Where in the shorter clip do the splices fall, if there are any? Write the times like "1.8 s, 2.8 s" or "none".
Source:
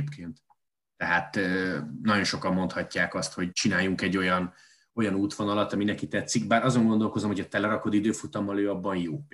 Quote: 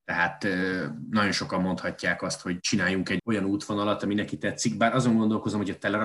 3.2 s